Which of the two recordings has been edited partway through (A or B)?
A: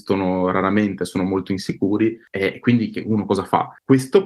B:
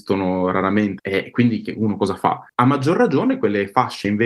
B